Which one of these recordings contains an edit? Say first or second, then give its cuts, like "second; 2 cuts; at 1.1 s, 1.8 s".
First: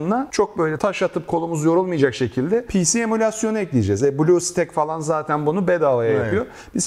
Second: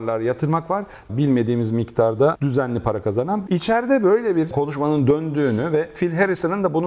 second; 2 cuts; at 1.1 s, 3.5 s